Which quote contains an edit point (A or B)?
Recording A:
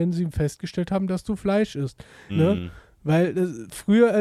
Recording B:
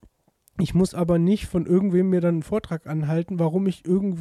A